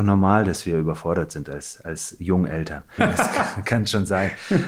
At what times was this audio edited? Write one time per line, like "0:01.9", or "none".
0:03.0